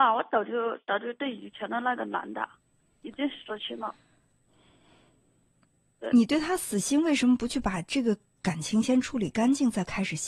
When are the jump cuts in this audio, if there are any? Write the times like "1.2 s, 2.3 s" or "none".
none